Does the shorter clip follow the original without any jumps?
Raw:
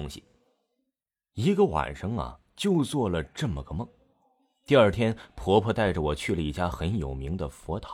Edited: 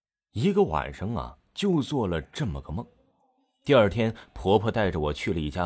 yes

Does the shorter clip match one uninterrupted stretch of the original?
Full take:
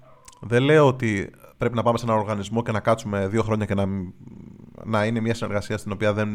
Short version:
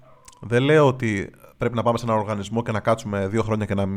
yes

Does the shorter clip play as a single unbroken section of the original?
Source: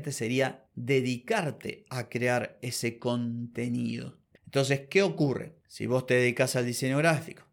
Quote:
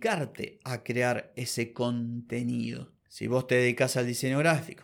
no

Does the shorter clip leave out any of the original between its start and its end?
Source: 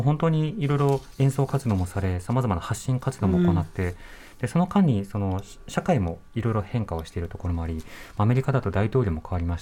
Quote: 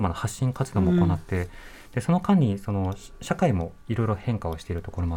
no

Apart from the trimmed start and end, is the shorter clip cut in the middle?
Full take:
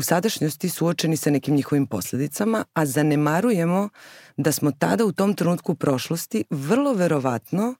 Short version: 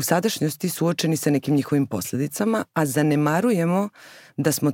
no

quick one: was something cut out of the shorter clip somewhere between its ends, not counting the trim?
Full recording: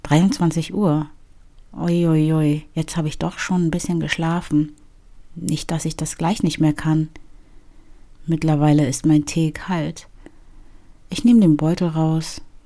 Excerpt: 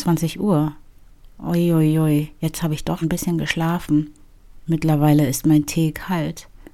yes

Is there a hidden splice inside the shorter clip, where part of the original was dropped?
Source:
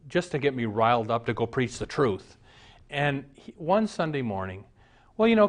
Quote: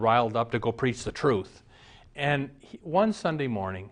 no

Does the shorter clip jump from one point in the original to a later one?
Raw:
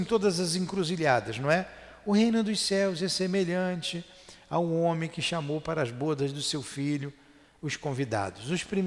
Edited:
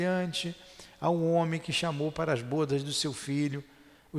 no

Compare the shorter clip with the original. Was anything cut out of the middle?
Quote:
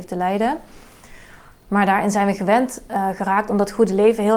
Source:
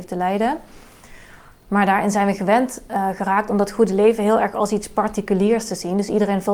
no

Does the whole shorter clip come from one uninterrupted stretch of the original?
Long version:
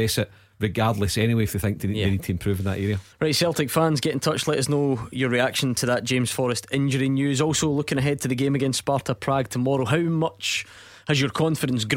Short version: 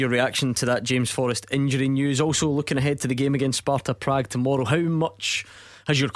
yes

